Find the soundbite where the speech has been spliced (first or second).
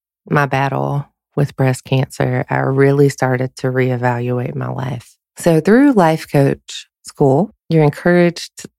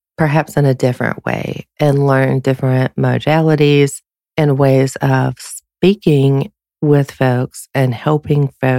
first